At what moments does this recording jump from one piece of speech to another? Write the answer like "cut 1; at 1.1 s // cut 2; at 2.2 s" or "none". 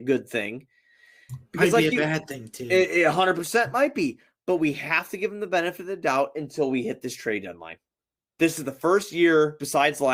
none